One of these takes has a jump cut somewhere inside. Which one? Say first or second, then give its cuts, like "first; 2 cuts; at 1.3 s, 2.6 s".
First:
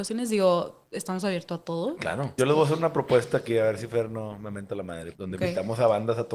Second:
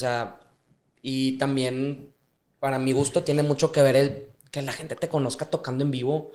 first; 2 cuts; at 2.4 s, 5.2 s